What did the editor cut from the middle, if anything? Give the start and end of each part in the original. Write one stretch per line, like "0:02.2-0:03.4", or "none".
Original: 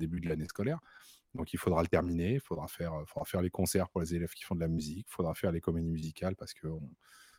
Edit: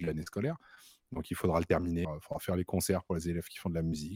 0:02.3-0:02.9